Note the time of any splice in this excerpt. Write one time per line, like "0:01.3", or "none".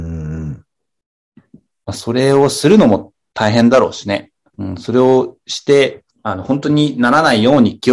0:04.5
0:06.1